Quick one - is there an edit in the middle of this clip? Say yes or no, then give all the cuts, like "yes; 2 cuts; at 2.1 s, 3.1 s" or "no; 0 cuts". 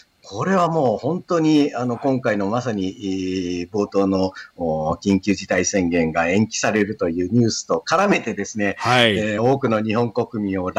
no; 0 cuts